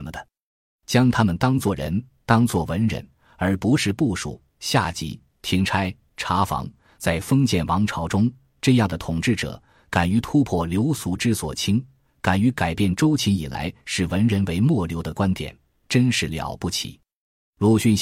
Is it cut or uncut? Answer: uncut